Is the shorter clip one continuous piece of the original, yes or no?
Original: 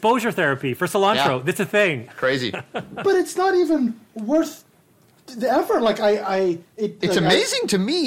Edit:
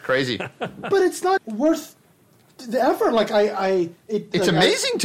no